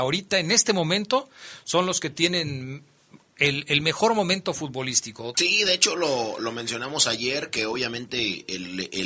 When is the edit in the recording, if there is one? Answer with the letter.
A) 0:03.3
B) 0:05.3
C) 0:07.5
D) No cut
B